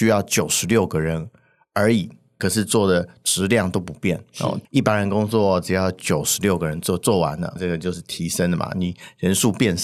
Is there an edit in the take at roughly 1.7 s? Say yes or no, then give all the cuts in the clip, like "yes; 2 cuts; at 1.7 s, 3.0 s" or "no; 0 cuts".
no; 2 cuts; at 4.6 s, 7.6 s